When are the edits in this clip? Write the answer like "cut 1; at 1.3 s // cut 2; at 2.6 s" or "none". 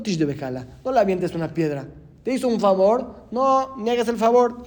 none